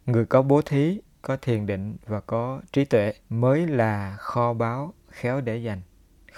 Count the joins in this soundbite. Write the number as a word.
two